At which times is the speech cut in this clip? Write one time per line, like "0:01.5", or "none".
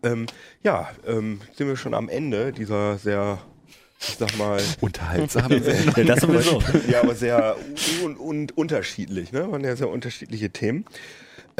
none